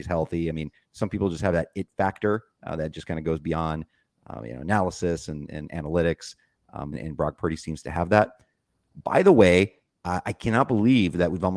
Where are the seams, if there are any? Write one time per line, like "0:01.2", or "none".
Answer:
0:06.9